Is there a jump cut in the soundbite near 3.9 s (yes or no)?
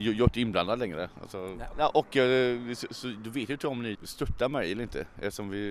yes